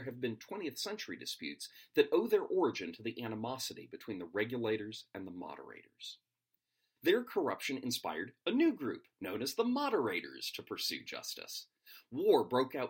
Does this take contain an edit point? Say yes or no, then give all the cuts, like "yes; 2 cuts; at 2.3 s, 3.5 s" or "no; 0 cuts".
yes; 1 cut; at 7.0 s